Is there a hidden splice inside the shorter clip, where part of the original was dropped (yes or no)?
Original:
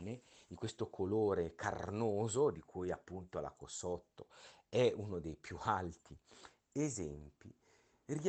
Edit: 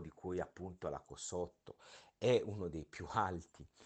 no